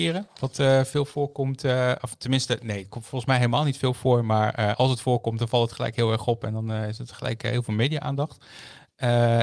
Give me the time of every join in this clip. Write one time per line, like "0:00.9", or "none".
none